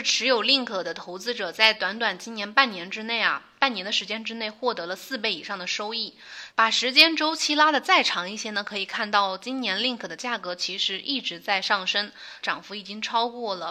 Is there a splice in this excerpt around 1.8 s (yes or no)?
no